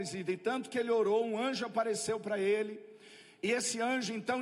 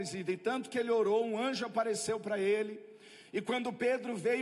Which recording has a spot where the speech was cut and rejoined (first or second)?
second